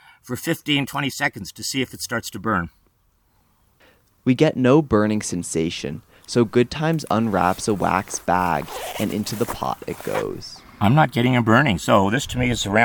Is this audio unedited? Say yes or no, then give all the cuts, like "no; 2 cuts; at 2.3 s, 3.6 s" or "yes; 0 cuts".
yes; 0 cuts